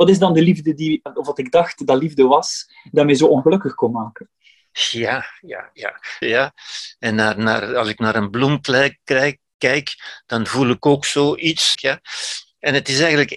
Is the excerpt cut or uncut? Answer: cut